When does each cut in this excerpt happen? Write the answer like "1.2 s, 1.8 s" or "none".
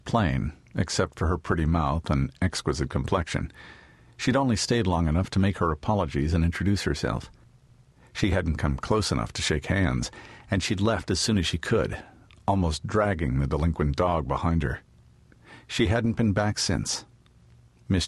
none